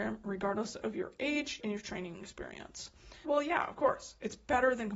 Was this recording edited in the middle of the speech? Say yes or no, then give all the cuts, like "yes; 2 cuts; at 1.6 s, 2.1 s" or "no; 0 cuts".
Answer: yes; 2 cuts; at 1.6 s, 3.2 s